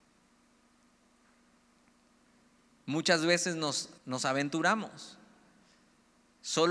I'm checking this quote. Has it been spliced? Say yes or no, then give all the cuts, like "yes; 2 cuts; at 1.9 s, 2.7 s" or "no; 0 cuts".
yes; 1 cut; at 4.0 s